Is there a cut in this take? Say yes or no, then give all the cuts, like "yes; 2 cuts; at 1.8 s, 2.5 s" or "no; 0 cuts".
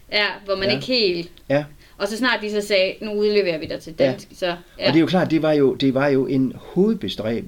no; 0 cuts